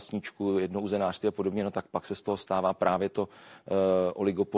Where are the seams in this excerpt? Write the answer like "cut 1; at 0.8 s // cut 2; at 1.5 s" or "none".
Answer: none